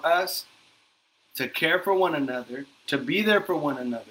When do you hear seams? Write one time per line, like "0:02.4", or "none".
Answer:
0:02.8

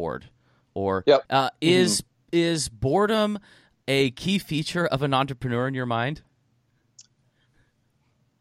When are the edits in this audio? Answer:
0:01.2

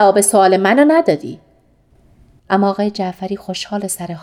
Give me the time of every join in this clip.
0:02.4

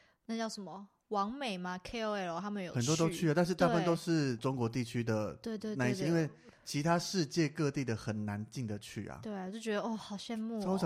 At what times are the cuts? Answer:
none

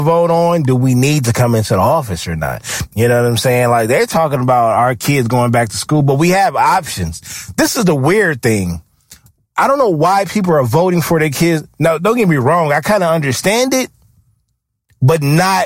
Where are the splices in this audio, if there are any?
0:02.9

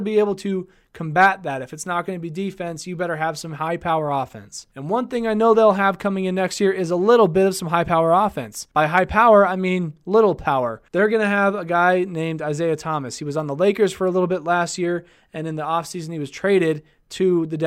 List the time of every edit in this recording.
none

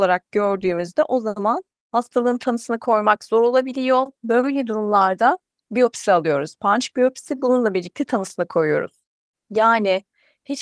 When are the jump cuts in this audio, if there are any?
0:06.6
0:09.3

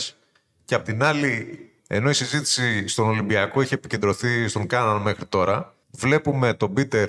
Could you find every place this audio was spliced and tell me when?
0:01.8
0:05.8

